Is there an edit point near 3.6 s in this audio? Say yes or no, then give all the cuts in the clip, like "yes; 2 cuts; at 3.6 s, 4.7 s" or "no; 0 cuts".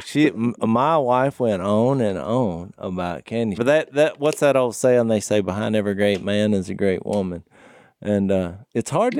yes; 1 cut; at 3.6 s